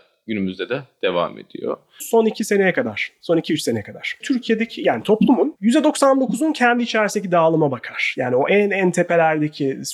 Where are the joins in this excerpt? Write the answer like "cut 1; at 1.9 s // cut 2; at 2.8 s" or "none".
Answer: cut 1; at 2.0 s // cut 2; at 4.2 s